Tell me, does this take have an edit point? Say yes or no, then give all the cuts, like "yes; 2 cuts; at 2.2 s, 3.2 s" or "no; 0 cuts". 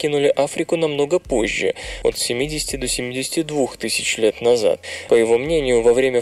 yes; 1 cut; at 5.1 s